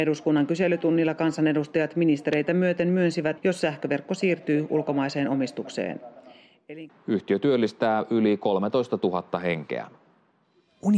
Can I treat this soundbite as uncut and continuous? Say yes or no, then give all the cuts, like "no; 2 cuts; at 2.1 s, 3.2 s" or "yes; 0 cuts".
no; 2 cuts; at 3.4 s, 6.9 s